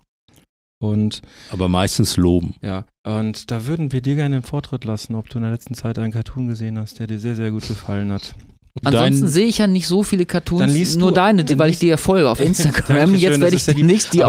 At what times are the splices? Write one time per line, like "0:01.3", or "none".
0:02.9
0:08.8